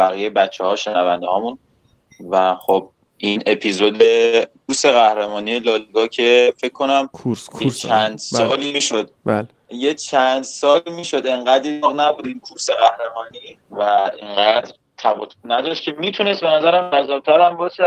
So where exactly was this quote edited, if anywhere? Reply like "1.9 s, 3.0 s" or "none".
9.5 s, 13.6 s